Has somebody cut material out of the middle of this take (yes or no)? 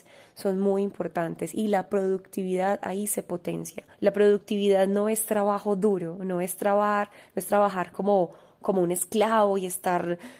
yes